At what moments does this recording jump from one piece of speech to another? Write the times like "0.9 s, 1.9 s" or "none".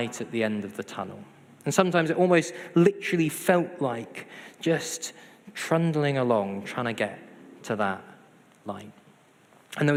none

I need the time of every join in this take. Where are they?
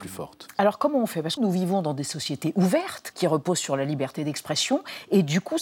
1.4 s, 3.1 s

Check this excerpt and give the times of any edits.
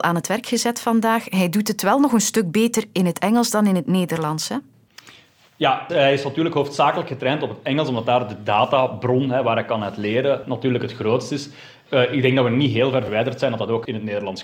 none

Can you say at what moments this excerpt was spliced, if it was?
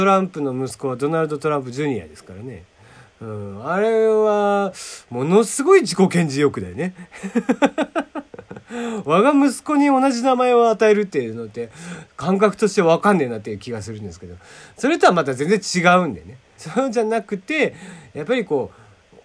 16.6 s

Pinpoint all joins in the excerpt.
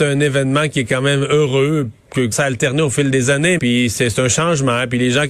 2.3 s, 3.6 s

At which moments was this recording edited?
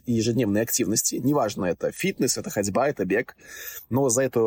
none

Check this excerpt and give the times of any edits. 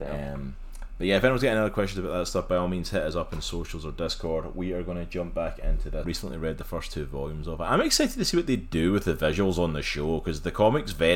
6.0 s

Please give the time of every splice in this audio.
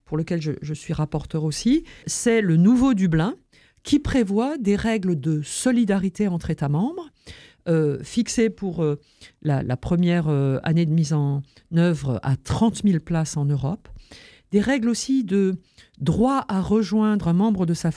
2.0 s

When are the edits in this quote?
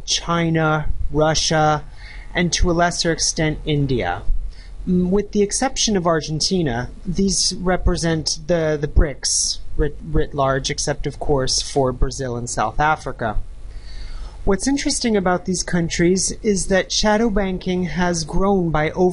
none

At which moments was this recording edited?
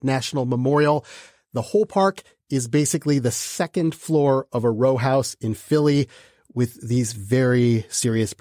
none

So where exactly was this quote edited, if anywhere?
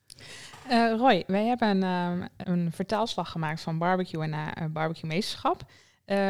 2.4 s

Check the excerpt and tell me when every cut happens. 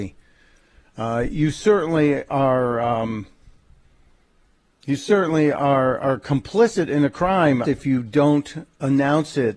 7.6 s

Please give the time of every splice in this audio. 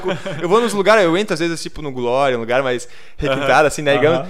none

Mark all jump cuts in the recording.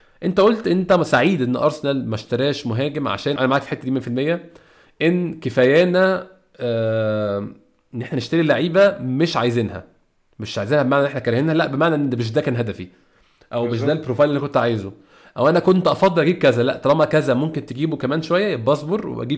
3.4 s

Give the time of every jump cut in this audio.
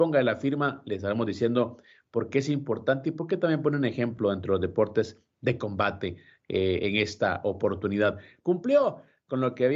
8.4 s

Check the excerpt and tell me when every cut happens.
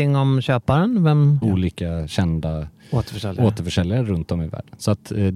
1.4 s

